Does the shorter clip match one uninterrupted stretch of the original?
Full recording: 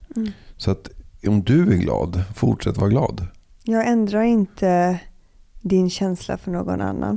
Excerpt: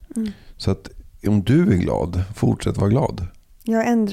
yes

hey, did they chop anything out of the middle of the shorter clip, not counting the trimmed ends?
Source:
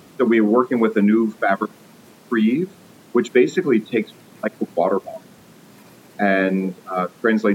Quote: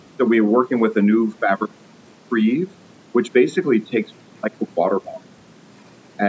no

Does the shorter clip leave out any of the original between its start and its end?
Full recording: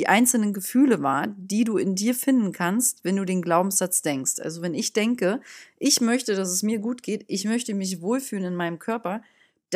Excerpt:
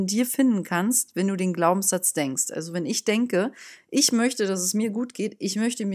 no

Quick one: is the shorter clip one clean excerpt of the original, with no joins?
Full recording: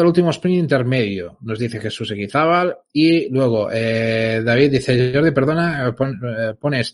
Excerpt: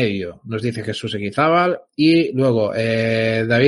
yes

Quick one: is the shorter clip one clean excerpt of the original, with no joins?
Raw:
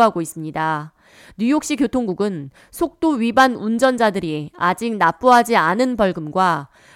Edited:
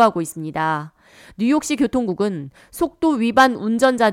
yes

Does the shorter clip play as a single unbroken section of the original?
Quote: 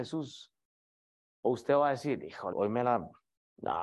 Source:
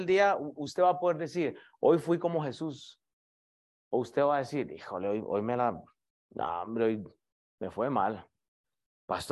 no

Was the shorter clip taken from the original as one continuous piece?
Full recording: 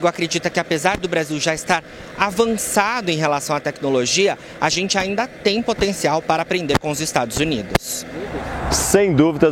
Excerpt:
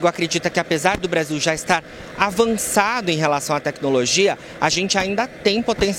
yes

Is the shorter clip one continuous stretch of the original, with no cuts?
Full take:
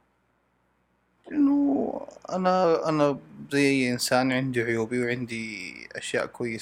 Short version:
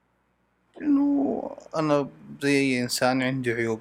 no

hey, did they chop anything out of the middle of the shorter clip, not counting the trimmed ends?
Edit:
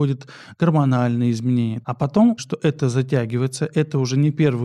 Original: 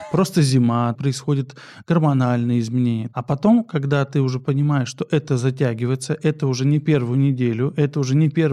yes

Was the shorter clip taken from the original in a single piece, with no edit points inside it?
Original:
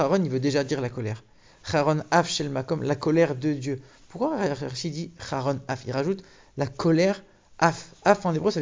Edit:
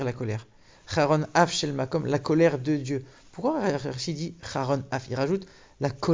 yes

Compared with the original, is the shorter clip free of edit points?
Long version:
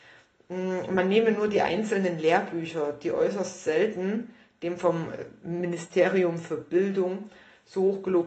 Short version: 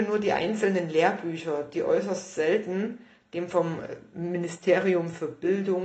yes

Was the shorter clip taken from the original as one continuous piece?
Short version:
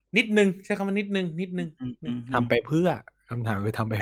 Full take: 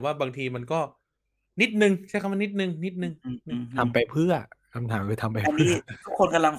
yes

